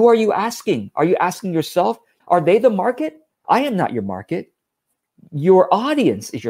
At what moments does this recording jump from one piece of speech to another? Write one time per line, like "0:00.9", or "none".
0:02.2
0:03.3